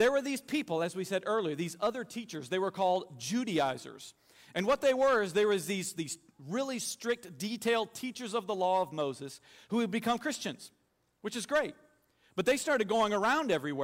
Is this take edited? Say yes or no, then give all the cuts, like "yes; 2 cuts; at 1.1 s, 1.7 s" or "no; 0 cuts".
yes; 1 cut; at 6.0 s